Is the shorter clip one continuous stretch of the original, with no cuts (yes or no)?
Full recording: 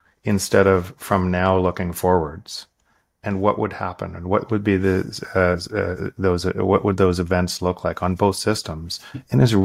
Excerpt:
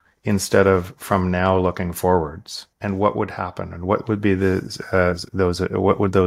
no